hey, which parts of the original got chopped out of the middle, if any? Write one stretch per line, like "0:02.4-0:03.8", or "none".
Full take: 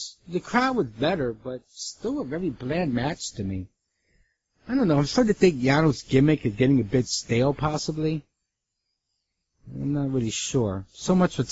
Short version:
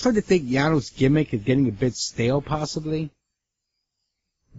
none